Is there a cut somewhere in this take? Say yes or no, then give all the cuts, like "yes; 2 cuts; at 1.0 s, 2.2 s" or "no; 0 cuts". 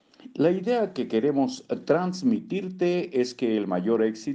no; 0 cuts